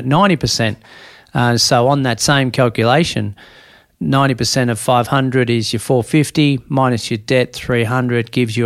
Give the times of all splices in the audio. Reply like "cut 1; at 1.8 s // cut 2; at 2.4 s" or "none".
none